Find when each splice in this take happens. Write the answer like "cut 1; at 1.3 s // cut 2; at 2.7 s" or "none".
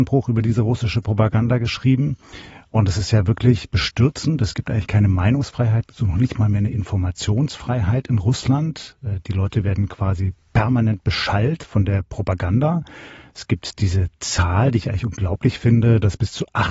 none